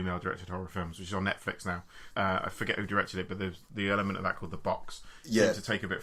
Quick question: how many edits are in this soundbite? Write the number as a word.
one